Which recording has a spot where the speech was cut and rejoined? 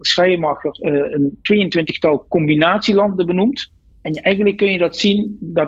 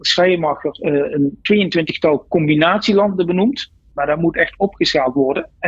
second; 1 cut; at 3.9 s

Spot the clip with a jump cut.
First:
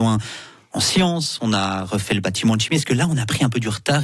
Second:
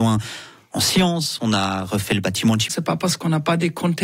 second; 1 cut; at 2.7 s

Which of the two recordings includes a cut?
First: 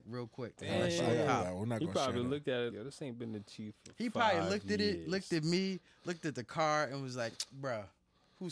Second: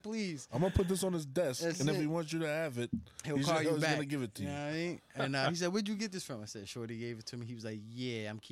first; 1 cut; at 2.7 s

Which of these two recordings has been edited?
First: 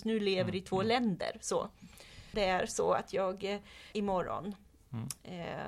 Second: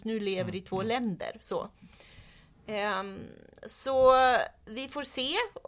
first; 2 cuts; at 2.3 s, 3.9 s

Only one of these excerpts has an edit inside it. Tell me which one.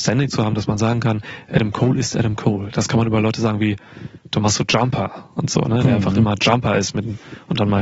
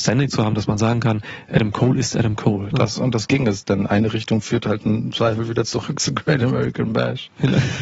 second; 1 cut; at 2.7 s

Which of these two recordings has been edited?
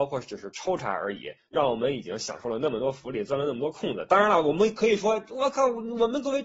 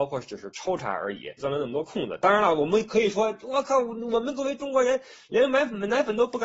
second; 1 cut; at 1.4 s

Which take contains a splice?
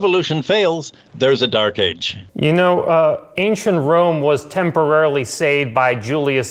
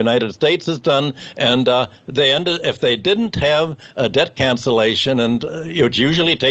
first; 1 cut; at 2.3 s

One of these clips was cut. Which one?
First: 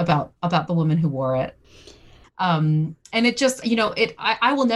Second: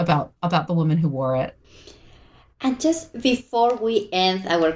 first; 2 cuts; at 2.2 s, 3.6 s

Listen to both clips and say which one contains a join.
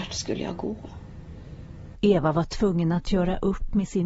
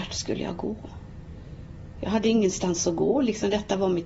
first; 1 cut; at 1.9 s

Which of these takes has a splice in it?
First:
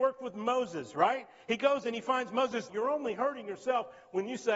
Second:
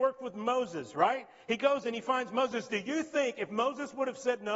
first; 1 cut; at 2.7 s

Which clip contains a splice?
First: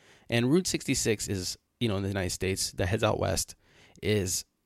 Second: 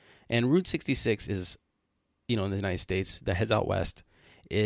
first; 1 cut; at 1.7 s

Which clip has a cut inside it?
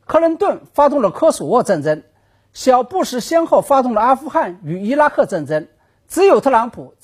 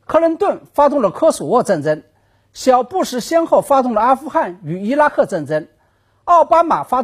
first; 1 cut; at 5.9 s

